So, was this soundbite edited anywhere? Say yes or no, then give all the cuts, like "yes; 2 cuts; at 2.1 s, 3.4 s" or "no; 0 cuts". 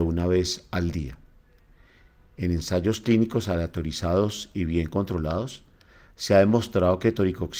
no; 0 cuts